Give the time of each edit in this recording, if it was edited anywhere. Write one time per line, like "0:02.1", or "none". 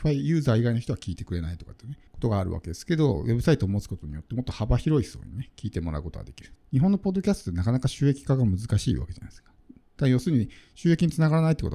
0:02.1
0:06.6